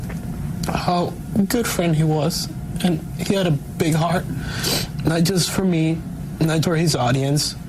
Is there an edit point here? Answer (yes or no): yes